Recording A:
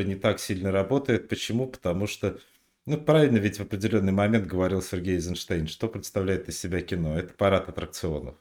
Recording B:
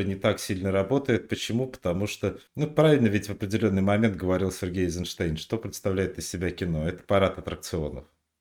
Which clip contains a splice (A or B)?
B